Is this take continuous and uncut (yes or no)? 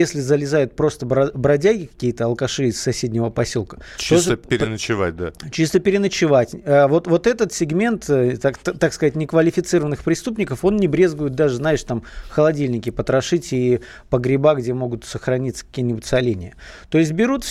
yes